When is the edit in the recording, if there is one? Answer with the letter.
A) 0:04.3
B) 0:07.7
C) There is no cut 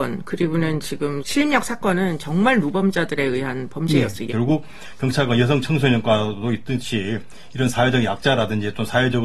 A